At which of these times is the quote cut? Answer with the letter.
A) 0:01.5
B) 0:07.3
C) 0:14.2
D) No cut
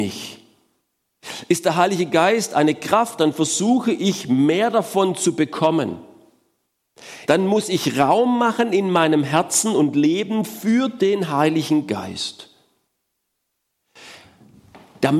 B